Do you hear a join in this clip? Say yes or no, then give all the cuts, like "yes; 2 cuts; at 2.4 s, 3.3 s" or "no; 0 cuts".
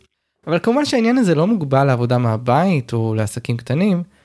no; 0 cuts